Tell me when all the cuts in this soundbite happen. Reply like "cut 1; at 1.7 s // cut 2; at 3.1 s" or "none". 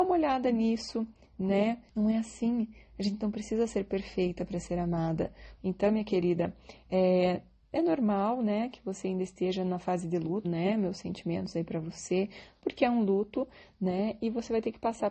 cut 1; at 1.9 s // cut 2; at 5.6 s // cut 3; at 10.4 s